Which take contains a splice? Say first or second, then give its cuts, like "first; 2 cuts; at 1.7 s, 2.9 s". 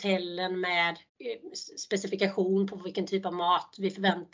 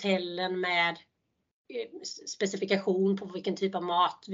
first; 1 cut; at 1.1 s